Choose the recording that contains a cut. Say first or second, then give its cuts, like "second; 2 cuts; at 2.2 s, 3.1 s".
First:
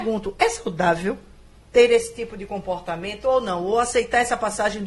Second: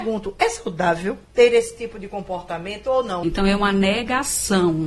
second; 2 cuts; at 1.2 s, 3.2 s